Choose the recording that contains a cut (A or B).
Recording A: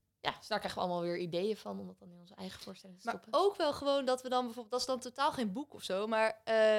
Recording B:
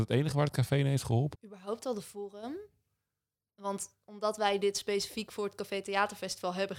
B